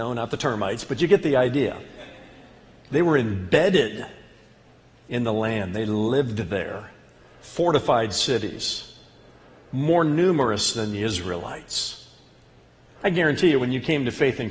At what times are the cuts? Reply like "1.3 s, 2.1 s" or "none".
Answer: none